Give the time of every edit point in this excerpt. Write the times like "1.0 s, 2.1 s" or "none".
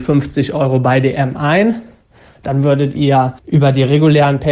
3.4 s